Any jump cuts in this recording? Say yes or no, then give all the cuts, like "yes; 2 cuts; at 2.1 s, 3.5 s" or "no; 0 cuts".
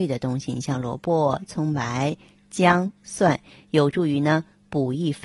no; 0 cuts